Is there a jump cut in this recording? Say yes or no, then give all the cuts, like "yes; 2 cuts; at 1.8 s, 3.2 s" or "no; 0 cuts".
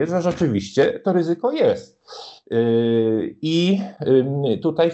no; 0 cuts